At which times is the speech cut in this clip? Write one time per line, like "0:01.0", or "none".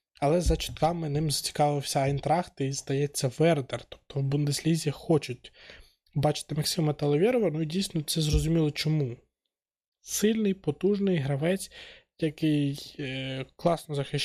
none